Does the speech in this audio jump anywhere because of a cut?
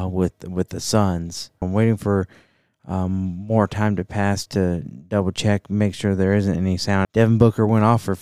yes; 2 cuts; at 1.6 s, 7.0 s

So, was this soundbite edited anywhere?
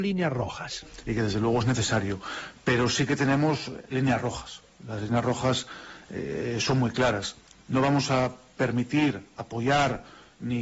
no; 0 cuts

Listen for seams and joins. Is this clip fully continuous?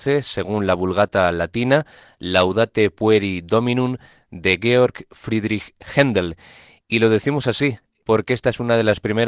no; 1 cut; at 8.0 s

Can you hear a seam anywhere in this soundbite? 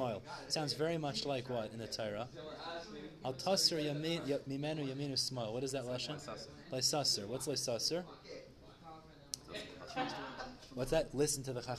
no; 0 cuts

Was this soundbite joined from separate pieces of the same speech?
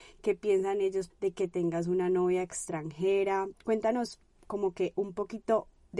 yes; 1 cut; at 1.1 s

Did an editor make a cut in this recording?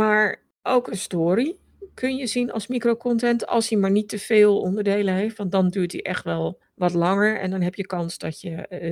no; 0 cuts

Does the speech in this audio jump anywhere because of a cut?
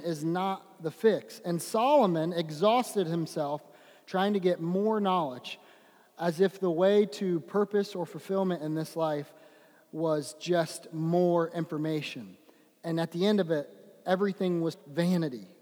yes; 1 cut; at 14.7 s

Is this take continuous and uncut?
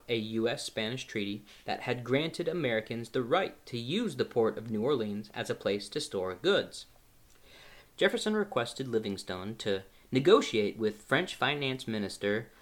no; 1 cut; at 7.9 s

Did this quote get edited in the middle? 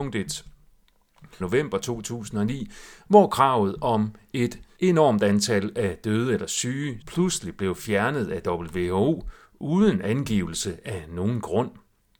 yes; 3 cuts; at 1.4 s, 4.8 s, 7.0 s

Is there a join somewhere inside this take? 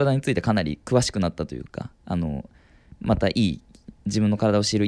yes; 1 cut; at 2.0 s

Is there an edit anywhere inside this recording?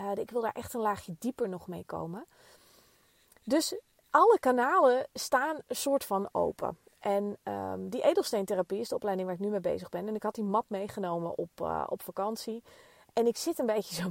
no; 0 cuts

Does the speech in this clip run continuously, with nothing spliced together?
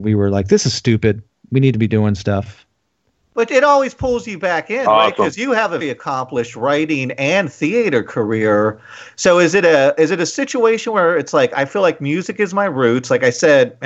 no; 1 cut; at 5.8 s

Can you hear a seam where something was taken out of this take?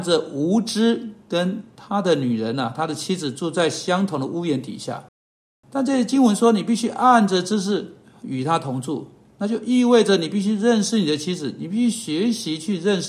no; 0 cuts

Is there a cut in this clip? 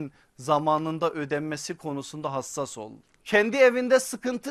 yes; 1 cut; at 3.2 s

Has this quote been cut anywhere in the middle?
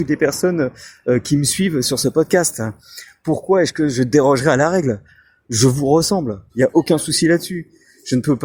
yes; 2 cuts; at 1.8 s, 6.5 s

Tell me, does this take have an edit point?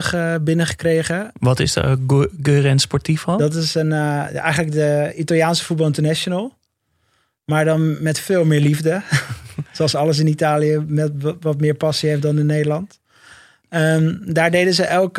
no; 0 cuts

